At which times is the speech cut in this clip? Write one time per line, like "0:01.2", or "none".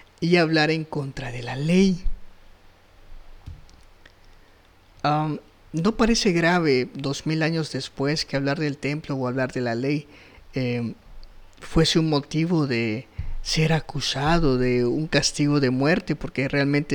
none

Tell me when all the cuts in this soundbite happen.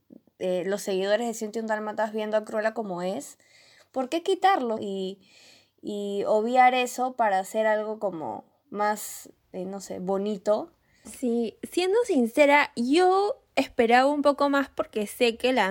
0:04.8
0:11.0

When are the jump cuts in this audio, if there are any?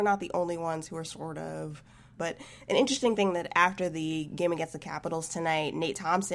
0:02.2

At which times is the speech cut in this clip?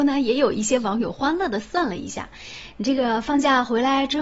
none

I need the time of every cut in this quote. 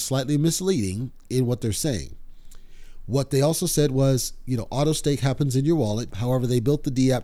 0:06.1

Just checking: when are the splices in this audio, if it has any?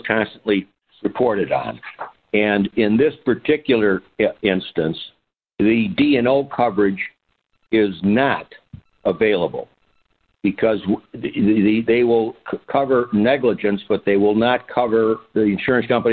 0:02.2

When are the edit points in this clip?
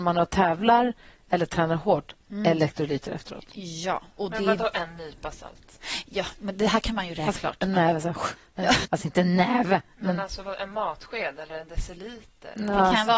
0:07.3
0:08.8

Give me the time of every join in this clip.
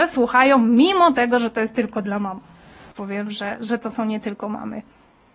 0:02.9

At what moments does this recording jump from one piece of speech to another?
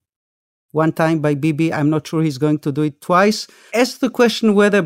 0:03.7

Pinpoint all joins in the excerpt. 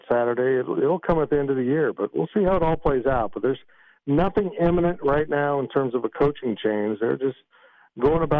none

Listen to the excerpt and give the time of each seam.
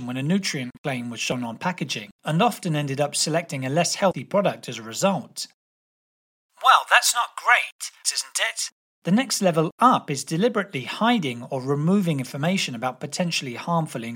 0:08.0

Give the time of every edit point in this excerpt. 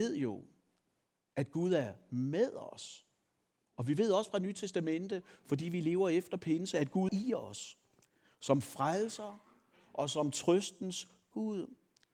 0:07.1

